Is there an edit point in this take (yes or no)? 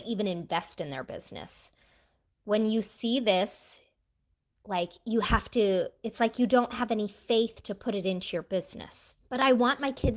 yes